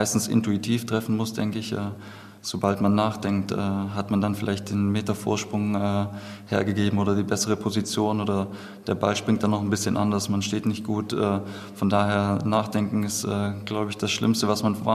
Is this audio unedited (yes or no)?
yes